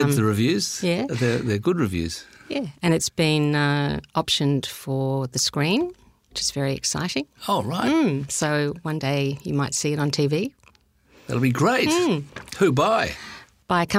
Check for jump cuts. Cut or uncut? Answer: uncut